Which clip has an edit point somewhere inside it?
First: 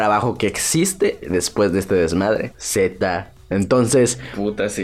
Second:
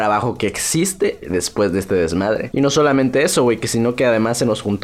first; 1 cut; at 2.5 s

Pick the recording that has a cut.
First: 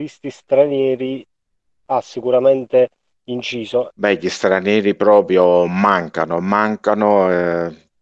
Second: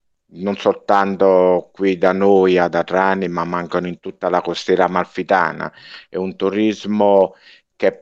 first; 1 cut; at 3.9 s

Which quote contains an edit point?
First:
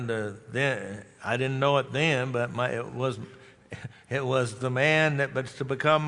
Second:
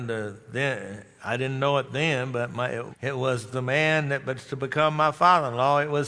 second; 1 cut; at 2.9 s

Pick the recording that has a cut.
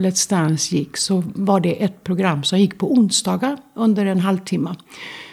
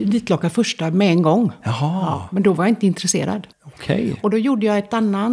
second; 1 cut; at 3.5 s

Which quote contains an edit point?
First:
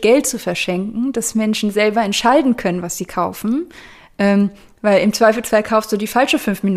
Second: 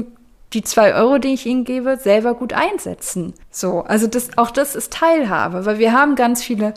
second; 1 cut; at 3.4 s

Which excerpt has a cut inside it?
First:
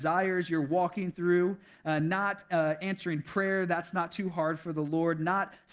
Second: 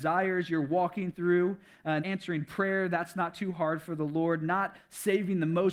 second; 1 cut; at 2.0 s

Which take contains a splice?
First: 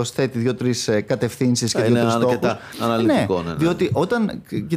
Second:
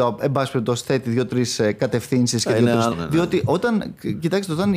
second; 1 cut; at 2.9 s

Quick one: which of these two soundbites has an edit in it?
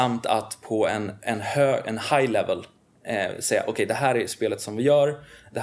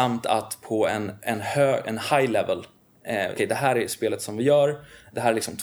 second; 1 cut; at 3.3 s

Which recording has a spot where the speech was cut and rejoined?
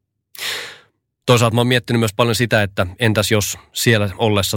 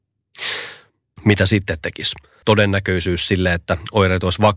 second; 2 cuts; at 1.2 s, 2.4 s

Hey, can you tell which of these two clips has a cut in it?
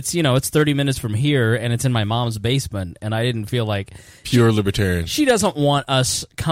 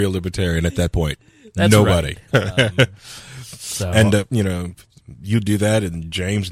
second; 1 cut; at 2.3 s

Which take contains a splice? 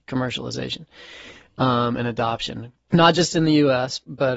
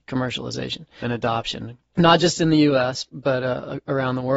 second; 1 cut; at 1.0 s

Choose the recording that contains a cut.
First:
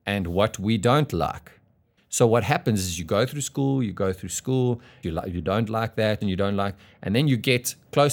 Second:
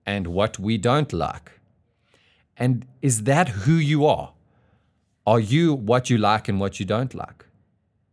first; 3 cuts; at 2.0 s, 5.0 s, 6.2 s

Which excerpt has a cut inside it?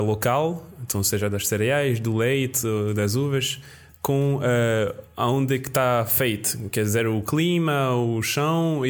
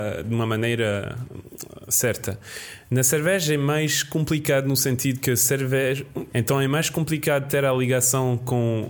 second; 1 cut; at 6.3 s

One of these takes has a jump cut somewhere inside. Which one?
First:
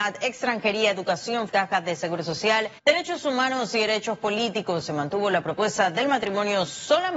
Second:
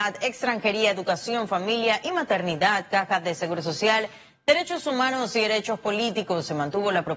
first; 2 cuts; at 1.5 s, 2.8 s

